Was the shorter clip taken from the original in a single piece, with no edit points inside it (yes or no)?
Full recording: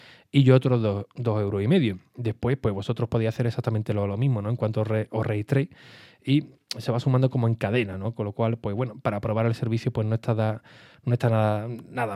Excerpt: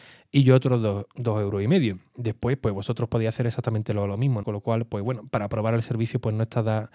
no